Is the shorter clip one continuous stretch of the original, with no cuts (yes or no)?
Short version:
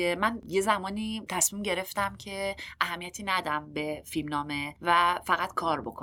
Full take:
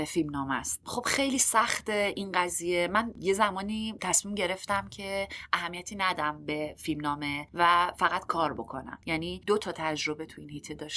yes